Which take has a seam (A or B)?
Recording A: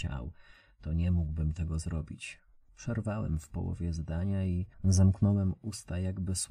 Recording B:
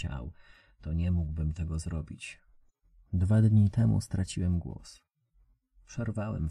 A